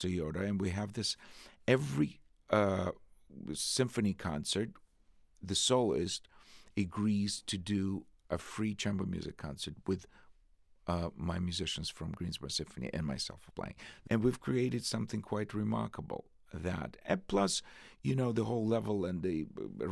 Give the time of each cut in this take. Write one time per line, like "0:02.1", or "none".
0:13.5